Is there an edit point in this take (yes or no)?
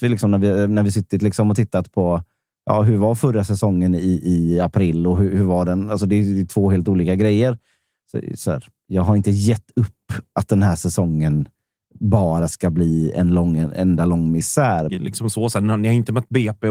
yes